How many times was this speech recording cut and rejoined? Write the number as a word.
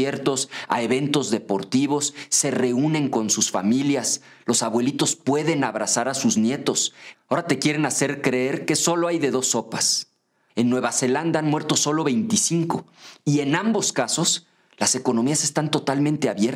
two